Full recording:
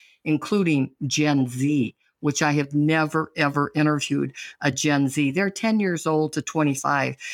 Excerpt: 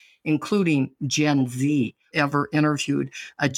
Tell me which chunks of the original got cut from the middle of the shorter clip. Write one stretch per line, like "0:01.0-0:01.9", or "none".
0:02.1-0:03.3